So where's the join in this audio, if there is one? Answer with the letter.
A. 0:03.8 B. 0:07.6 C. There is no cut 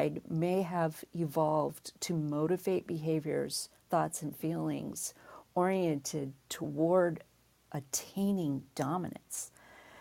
C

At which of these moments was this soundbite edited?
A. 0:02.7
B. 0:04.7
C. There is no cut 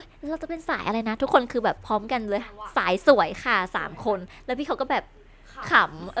A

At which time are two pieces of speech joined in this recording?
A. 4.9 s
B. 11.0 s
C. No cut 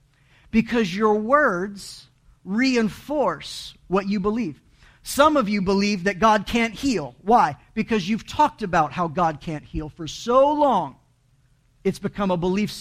C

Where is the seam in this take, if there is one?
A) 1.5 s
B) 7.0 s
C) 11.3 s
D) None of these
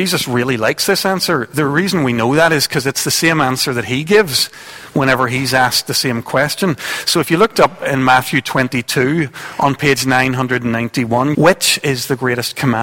C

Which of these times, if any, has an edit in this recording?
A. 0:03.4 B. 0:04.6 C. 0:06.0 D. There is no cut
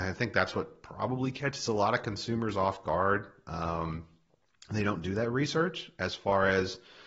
D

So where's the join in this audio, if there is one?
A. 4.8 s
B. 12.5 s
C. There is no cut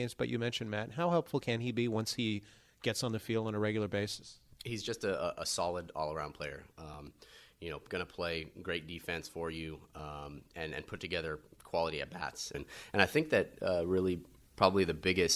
B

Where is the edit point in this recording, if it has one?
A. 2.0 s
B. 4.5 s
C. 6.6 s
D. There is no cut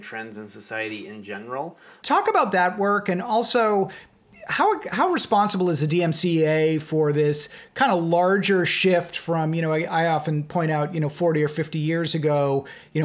A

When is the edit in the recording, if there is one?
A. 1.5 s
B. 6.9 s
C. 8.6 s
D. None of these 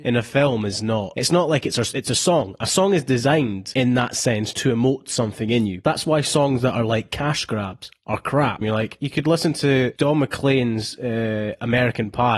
C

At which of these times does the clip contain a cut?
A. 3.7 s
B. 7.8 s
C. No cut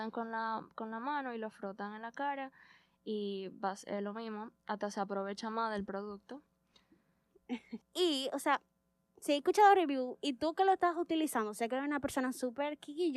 B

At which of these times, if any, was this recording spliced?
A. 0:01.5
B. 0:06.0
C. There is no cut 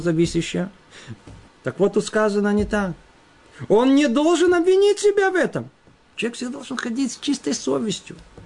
A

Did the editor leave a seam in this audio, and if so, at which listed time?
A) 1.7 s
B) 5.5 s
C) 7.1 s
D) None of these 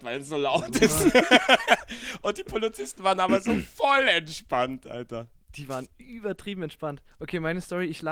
C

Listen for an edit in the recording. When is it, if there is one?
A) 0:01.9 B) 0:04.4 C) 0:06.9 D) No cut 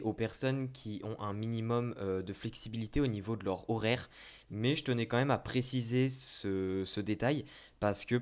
B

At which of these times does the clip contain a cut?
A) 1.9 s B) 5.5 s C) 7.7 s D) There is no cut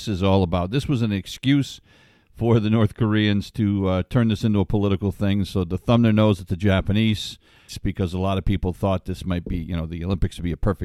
C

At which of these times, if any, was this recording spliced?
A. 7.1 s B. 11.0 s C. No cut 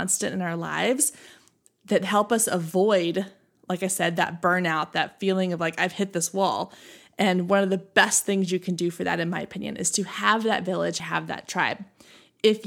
B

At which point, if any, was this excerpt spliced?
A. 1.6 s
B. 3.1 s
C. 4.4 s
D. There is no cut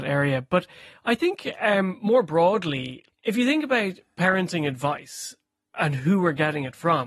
B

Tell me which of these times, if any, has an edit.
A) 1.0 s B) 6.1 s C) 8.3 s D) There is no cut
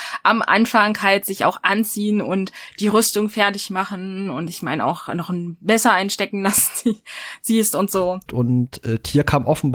C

